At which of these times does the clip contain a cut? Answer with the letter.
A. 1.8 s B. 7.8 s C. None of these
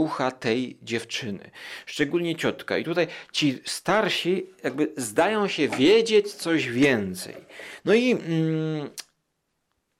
B